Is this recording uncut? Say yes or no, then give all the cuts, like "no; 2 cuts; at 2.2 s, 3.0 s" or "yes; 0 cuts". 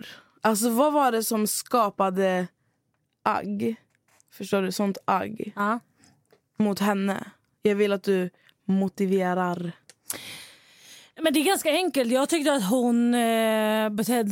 yes; 0 cuts